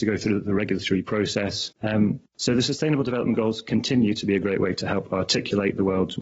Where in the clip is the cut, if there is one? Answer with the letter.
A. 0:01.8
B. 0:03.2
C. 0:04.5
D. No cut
A